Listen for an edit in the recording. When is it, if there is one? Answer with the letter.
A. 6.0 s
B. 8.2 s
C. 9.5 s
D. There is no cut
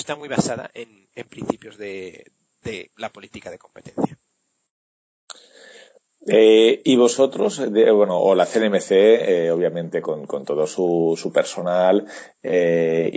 D